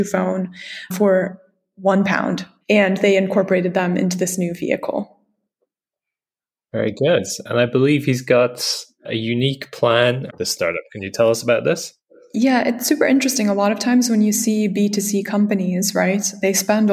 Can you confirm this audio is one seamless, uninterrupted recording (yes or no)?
no